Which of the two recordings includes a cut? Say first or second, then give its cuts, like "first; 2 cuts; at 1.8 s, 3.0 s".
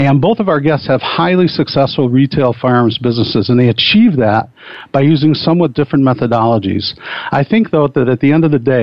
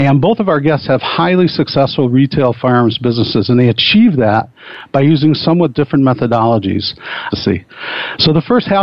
second; 1 cut; at 7.3 s